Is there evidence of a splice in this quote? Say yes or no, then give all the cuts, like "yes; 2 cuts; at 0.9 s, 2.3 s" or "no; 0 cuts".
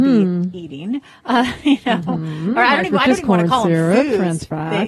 no; 0 cuts